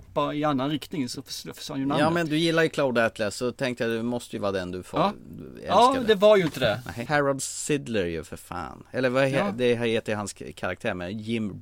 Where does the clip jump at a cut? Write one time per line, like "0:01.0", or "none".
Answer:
0:02.3
0:07.1